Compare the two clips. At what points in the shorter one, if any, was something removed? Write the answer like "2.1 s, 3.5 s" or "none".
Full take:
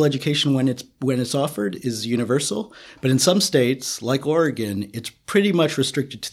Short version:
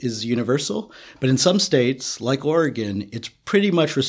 none